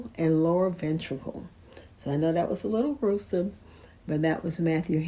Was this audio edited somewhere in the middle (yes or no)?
no